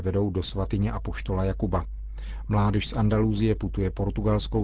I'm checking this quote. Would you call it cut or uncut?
uncut